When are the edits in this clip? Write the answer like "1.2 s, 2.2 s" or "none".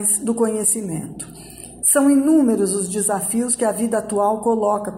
none